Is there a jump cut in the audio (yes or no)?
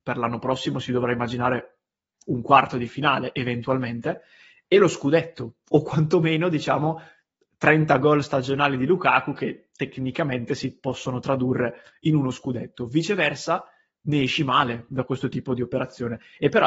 no